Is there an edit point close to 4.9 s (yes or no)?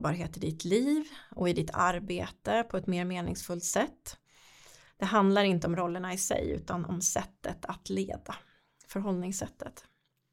yes